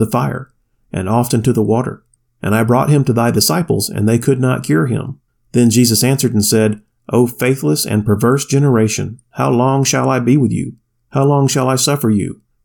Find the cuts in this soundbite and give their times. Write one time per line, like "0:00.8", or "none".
none

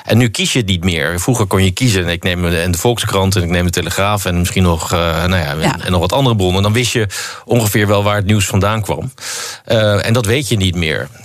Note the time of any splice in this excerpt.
none

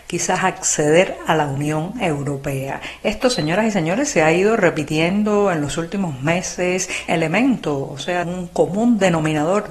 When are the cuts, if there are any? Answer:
0:07.1
0:08.2

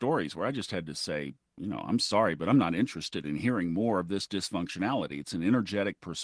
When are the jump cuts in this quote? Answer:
none

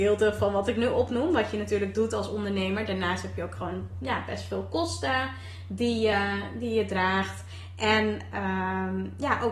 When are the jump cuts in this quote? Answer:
none

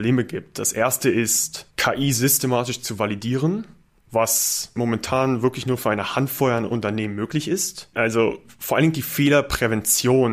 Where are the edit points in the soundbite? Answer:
0:04.8
0:07.9

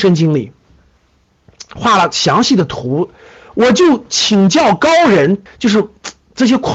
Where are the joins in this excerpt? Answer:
0:05.5

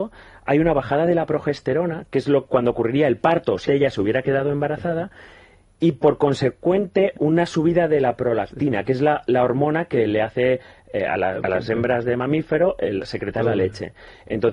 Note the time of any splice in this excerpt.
0:03.7

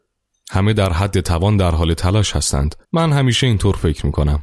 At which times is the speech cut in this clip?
0:02.8

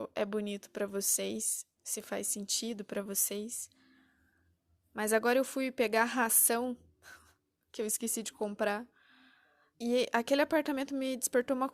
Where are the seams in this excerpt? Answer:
0:09.7

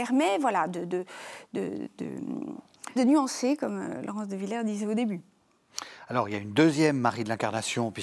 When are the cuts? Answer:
0:03.0

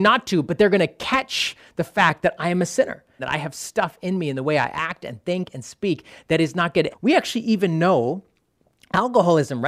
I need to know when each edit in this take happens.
0:03.2
0:06.9

